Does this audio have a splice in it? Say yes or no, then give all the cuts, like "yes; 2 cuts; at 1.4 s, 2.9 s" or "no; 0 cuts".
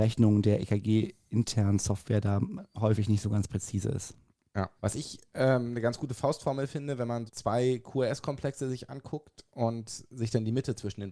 yes; 2 cuts; at 4.8 s, 7.3 s